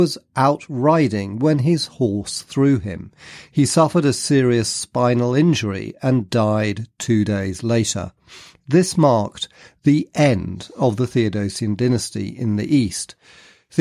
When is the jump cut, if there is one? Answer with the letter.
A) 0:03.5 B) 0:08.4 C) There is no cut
C